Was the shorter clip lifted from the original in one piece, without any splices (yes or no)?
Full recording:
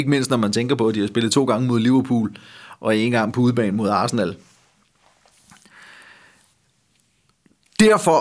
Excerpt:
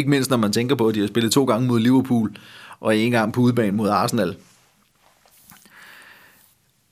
yes